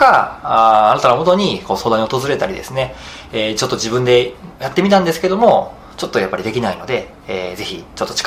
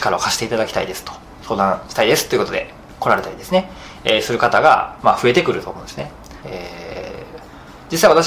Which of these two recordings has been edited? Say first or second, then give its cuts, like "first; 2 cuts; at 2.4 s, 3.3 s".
second; 1 cut; at 6.4 s